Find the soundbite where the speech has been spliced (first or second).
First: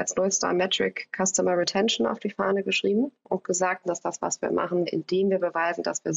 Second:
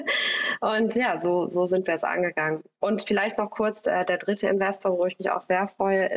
first